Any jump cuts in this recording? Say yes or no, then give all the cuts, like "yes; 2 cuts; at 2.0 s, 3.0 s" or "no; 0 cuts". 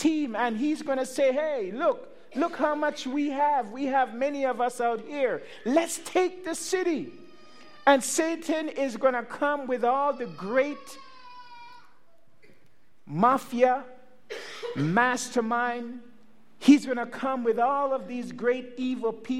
no; 0 cuts